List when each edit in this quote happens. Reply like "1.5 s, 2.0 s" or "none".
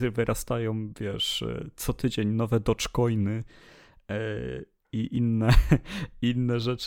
none

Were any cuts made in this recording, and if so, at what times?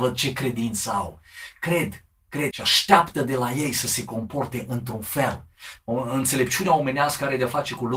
2.5 s, 5.8 s

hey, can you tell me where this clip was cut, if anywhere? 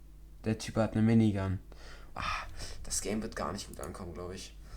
2.1 s

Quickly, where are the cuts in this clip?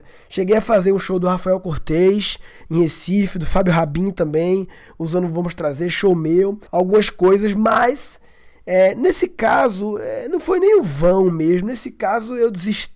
6.7 s

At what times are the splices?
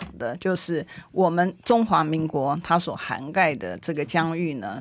none

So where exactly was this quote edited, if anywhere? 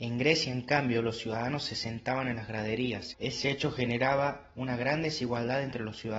3.1 s

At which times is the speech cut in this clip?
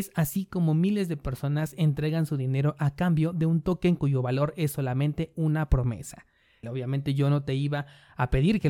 6.6 s

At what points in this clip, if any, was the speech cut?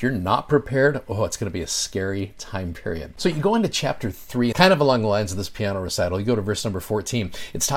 4.5 s

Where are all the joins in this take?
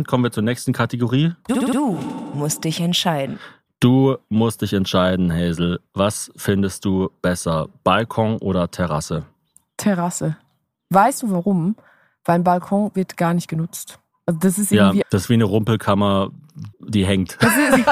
15.0 s, 16.7 s

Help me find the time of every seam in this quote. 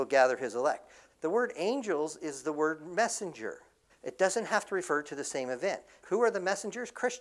1.1 s, 3.9 s, 6.0 s

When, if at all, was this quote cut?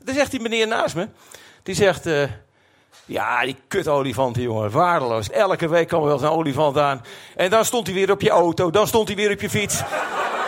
5.3 s

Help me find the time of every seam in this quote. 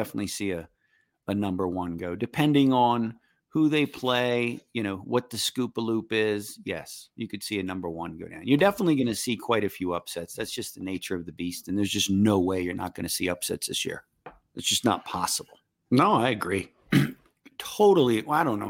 15.8 s

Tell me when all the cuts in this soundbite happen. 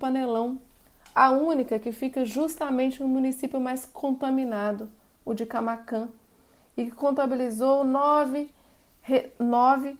none

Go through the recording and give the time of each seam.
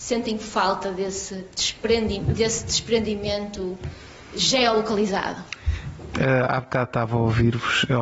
6.1 s

